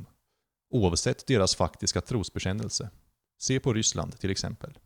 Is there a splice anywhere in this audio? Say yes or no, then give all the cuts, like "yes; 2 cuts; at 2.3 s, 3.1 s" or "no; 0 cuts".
yes; 1 cut; at 3.2 s